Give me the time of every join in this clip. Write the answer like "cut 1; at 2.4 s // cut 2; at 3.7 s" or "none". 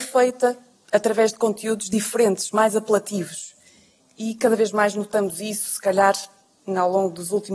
none